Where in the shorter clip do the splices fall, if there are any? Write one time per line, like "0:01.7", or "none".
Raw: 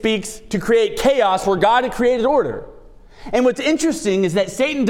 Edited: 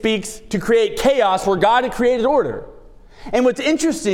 none